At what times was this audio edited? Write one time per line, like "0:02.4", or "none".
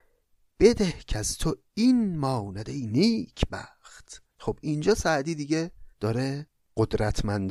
0:04.3
0:05.9